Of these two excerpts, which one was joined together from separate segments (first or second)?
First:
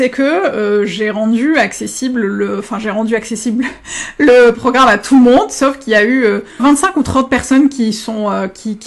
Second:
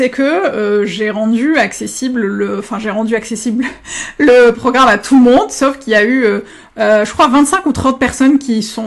first